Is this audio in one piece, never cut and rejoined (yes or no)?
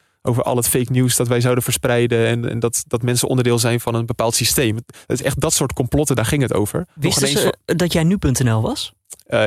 yes